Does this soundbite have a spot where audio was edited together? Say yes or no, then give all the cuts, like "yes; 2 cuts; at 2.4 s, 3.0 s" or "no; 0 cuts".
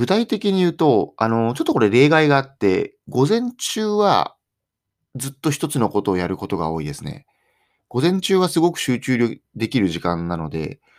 no; 0 cuts